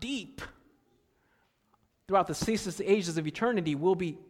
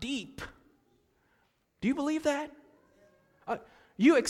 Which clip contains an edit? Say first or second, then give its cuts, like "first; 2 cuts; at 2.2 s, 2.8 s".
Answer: second; 1 cut; at 1.6 s